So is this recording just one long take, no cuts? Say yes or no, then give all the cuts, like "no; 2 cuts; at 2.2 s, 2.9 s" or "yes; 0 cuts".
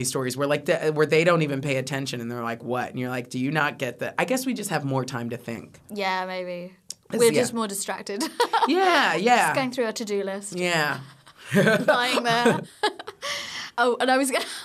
yes; 0 cuts